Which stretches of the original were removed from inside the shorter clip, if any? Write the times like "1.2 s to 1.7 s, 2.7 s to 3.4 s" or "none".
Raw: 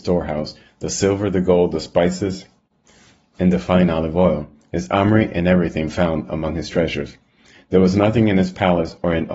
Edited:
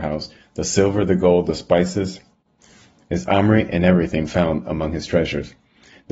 3.2 s to 4.6 s